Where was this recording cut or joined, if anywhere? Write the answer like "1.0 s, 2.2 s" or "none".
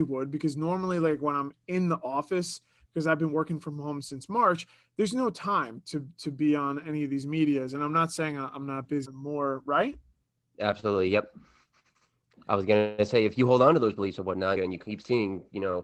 9.0 s, 14.6 s